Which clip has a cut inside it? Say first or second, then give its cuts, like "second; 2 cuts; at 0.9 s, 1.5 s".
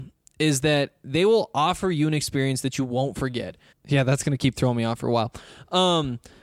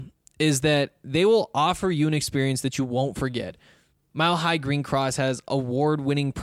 first; 1 cut; at 3.7 s